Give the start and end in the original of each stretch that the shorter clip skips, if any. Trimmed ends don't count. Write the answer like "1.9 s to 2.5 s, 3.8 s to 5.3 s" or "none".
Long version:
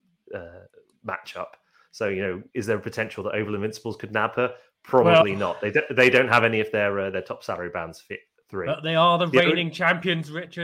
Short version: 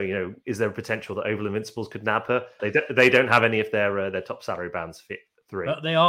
4.7 s to 5.6 s